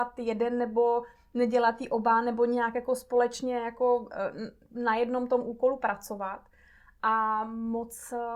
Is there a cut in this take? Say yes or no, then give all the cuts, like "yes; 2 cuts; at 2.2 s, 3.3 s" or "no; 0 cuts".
no; 0 cuts